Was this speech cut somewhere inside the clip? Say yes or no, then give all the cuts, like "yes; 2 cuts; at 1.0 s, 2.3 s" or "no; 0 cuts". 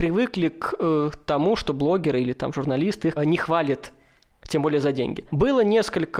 yes; 1 cut; at 3.2 s